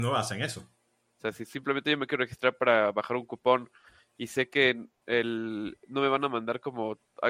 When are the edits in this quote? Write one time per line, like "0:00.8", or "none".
0:01.1